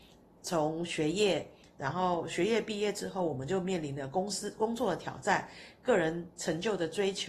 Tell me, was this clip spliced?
no; 0 cuts

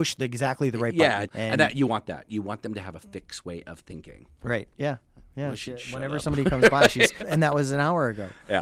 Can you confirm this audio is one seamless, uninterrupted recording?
no; 3 cuts; at 1.2 s, 4.7 s, 7.2 s

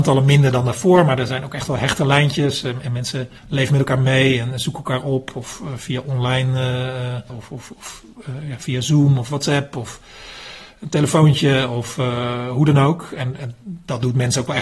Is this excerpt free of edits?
no; 2 cuts; at 3.4 s, 7.3 s

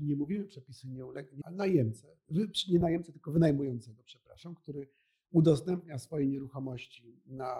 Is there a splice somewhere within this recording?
yes; 1 cut; at 1.4 s

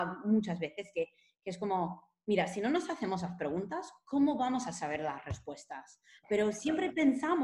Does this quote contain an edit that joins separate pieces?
no; 0 cuts

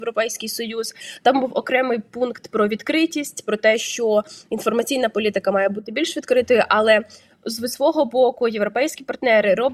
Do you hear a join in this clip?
no; 0 cuts

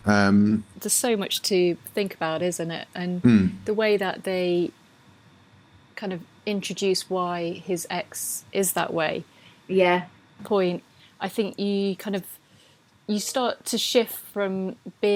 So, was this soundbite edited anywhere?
yes; 1 cut; at 10.4 s

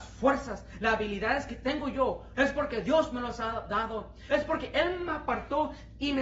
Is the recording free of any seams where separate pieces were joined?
no; 2 cuts; at 2.4 s, 4.3 s

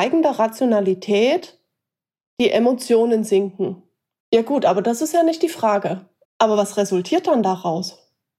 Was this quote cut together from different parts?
yes; 2 cuts; at 4.2 s, 6.2 s

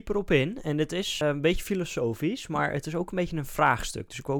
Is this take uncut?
no; 1 cut; at 1.2 s

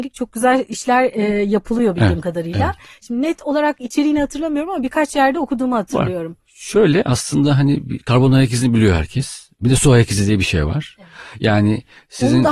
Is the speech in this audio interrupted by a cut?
no; 0 cuts

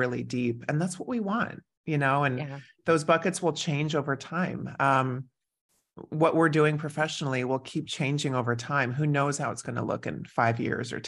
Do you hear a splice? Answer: no; 0 cuts

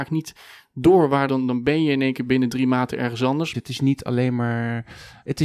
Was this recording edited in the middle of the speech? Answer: yes; 2 cuts; at 1.3 s, 3.5 s

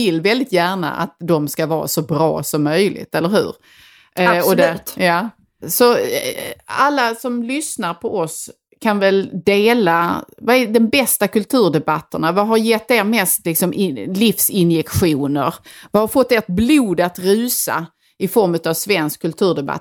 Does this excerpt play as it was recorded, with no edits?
yes; 0 cuts

